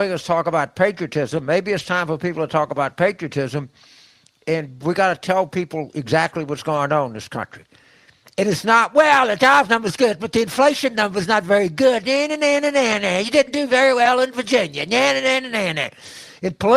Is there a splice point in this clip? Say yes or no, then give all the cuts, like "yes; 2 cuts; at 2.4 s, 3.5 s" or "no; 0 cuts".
no; 0 cuts